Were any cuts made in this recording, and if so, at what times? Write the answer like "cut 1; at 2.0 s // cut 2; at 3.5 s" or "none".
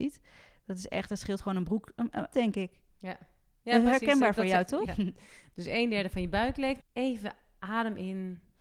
cut 1; at 2.3 s // cut 2; at 4.9 s // cut 3; at 6.8 s